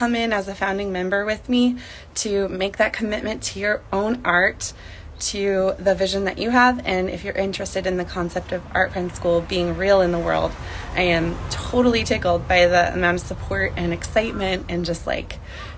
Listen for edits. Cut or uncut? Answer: uncut